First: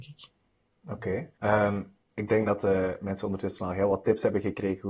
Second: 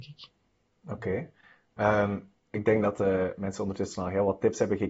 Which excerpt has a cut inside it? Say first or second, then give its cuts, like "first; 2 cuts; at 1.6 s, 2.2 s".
first; 1 cut; at 1.3 s